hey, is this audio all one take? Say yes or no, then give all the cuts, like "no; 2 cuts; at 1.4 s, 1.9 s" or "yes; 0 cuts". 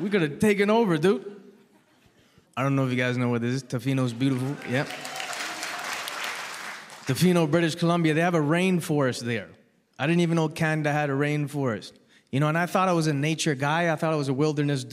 no; 1 cut; at 2.4 s